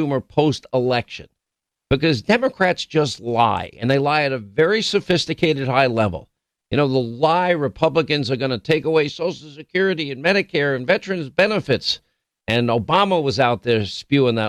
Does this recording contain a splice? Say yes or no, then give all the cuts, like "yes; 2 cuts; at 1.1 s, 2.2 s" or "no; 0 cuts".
no; 0 cuts